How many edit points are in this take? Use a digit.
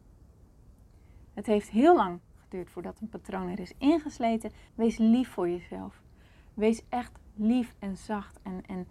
1